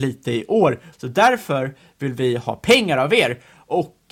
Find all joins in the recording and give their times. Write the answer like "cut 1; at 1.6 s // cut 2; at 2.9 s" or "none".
cut 1; at 0.9 s